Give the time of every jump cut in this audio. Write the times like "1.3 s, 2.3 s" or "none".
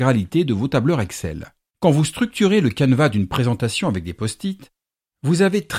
1.7 s